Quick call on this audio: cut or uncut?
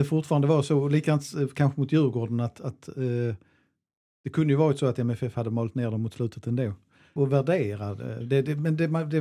cut